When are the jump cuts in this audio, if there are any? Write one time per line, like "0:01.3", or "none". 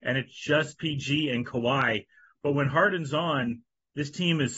none

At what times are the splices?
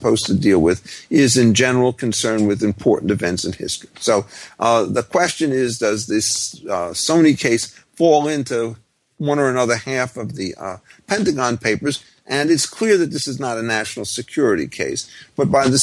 none

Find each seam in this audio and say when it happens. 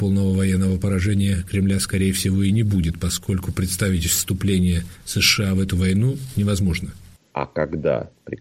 0:07.2

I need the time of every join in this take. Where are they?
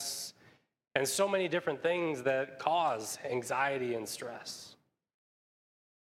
none

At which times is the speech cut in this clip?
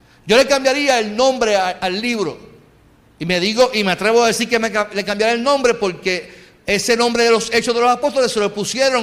0:01.8
0:06.6

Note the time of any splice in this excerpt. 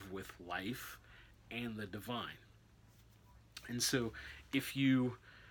none

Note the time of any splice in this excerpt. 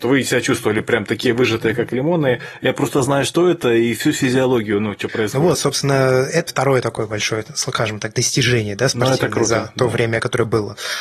0:06.5

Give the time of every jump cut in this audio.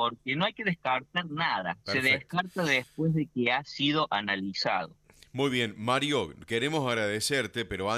0:01.8

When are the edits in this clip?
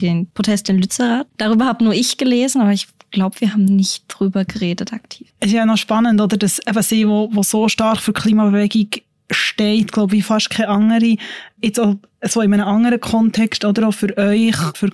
0:05.3

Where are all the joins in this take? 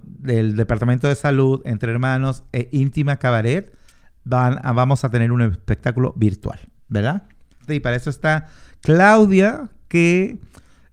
0:07.7

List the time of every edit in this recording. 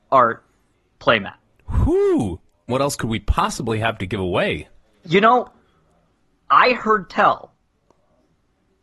0:02.7

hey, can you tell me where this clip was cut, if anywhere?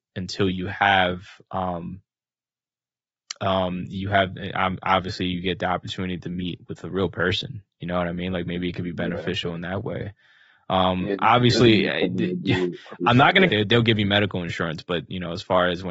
0:13.5

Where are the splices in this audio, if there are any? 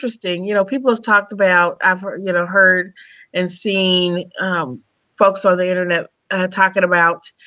none

